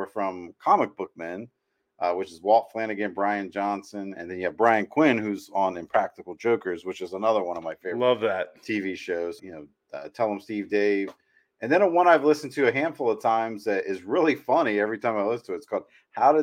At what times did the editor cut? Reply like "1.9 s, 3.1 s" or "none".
9.4 s